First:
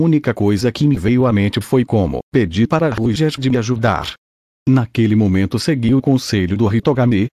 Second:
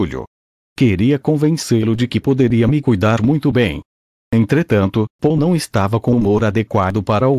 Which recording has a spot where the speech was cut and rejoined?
first; 1 cut; at 2.2 s

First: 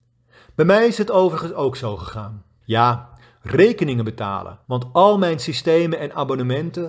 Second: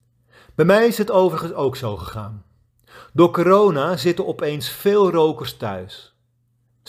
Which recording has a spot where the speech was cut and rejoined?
first; 2 cuts; at 2.6 s, 4.6 s

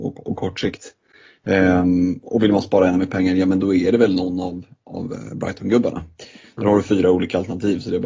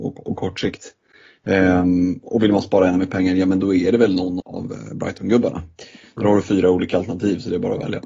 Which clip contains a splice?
second; 1 cut; at 4.4 s

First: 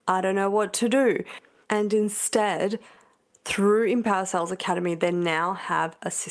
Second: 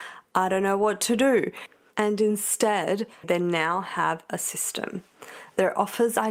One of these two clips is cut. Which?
second; 1 cut; at 3.2 s

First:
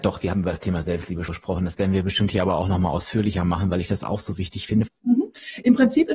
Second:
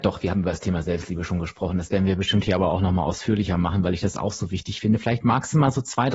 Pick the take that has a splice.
first; 2 cuts; at 1.3 s, 4.9 s

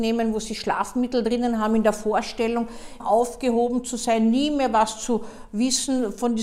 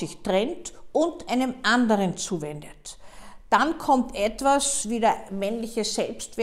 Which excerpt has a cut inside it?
first; 1 cut; at 3.0 s

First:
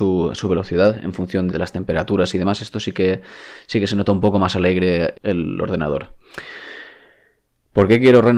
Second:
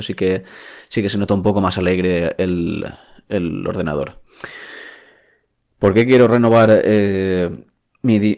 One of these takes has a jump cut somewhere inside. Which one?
first; 2 cuts; at 1.5 s, 5.1 s

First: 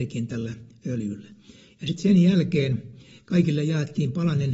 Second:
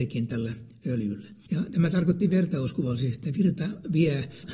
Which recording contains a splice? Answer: second; 1 cut; at 1.5 s

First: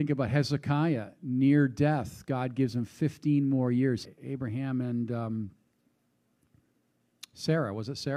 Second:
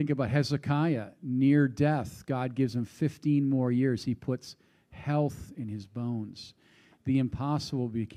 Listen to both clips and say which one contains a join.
first; 1 cut; at 4.0 s

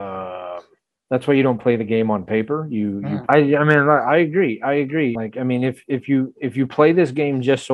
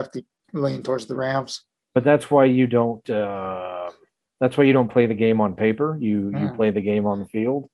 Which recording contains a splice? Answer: first; 2 cuts; at 3.3 s, 5.2 s

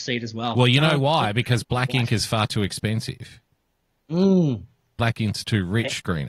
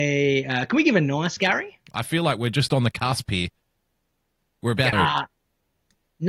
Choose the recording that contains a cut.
second; 2 cuts; at 1.9 s, 4.9 s

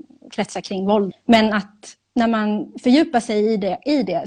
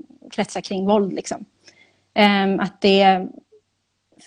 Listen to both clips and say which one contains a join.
first; 1 cut; at 1.1 s

